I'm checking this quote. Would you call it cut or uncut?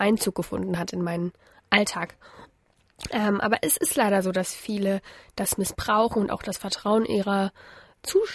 uncut